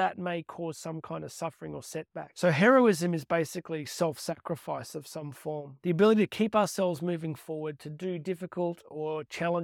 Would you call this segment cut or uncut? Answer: uncut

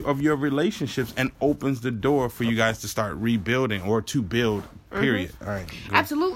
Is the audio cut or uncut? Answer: uncut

